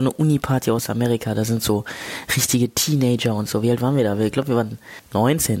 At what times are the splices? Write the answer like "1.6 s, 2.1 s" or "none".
none